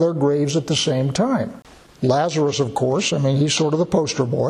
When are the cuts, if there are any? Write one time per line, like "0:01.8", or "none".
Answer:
0:01.9